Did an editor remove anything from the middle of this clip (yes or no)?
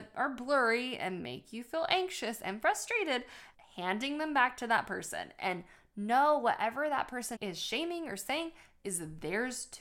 yes